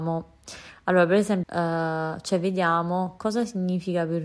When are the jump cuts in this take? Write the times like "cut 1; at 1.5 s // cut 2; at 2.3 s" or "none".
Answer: cut 1; at 1.4 s